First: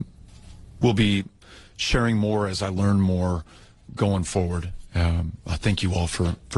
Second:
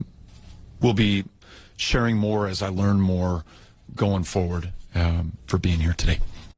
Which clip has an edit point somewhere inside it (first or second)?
second